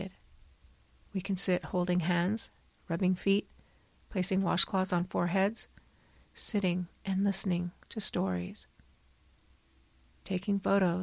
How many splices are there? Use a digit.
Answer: 1